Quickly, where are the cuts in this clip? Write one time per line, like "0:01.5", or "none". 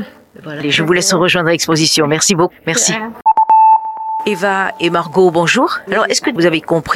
0:05.9